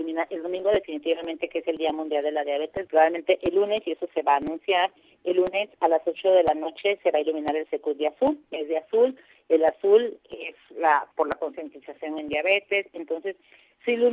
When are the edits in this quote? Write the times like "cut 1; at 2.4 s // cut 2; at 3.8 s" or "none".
cut 1; at 2.9 s // cut 2; at 8.4 s // cut 3; at 12.9 s